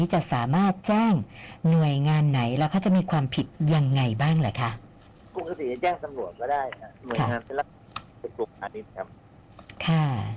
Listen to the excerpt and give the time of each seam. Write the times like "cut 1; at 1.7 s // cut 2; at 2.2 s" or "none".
none